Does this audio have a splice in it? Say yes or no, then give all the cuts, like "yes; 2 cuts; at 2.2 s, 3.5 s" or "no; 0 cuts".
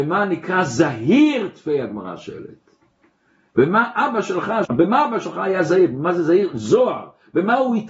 yes; 1 cut; at 4.7 s